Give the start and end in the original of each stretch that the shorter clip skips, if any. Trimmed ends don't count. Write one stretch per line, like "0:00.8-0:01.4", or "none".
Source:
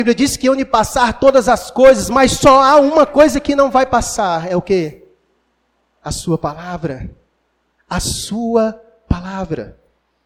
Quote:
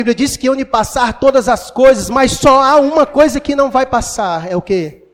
none